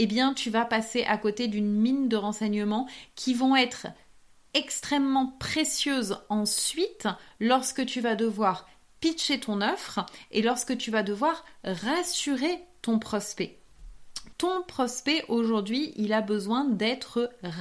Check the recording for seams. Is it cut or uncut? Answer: cut